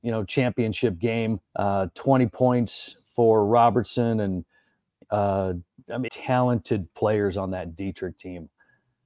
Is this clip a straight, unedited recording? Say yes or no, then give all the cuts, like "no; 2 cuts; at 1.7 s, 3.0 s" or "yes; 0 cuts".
no; 2 cuts; at 1.5 s, 6.1 s